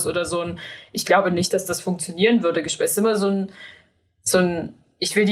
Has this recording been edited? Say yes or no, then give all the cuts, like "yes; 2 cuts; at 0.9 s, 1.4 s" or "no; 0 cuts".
no; 0 cuts